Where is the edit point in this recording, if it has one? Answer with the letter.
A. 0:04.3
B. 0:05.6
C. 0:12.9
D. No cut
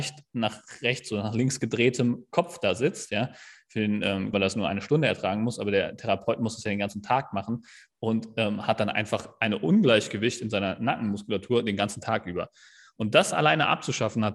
A